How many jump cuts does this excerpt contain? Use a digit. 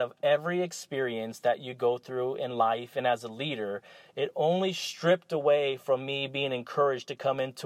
1